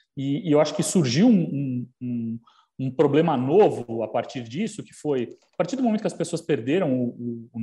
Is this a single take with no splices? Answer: yes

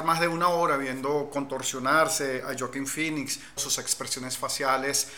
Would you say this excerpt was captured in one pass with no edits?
no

